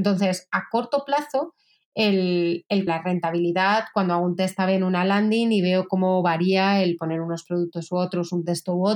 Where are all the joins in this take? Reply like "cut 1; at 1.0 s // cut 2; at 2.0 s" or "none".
cut 1; at 2.9 s